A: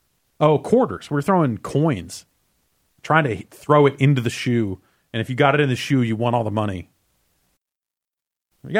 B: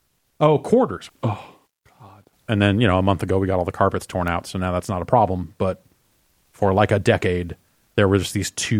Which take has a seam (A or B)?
B